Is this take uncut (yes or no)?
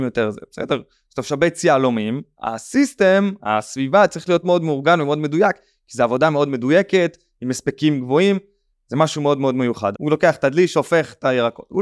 no